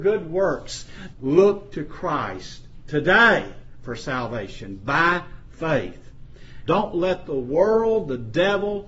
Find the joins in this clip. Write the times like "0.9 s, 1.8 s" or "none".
1.1 s, 6.7 s